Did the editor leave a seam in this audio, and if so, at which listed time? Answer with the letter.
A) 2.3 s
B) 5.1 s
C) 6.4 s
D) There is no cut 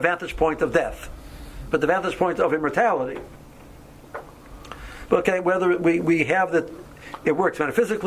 B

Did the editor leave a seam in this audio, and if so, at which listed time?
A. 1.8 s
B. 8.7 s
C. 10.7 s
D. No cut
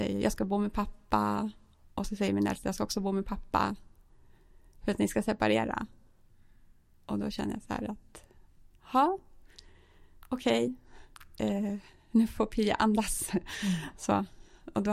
D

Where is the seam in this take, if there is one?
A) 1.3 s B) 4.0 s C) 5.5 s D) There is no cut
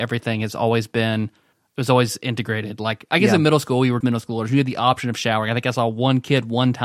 B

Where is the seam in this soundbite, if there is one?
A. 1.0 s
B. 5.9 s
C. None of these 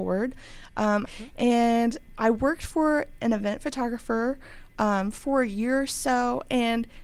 A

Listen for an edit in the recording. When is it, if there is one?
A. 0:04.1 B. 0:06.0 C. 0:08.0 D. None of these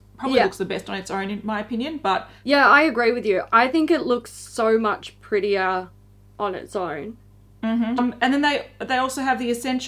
C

